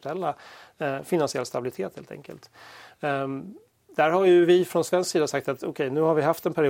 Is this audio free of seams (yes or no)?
yes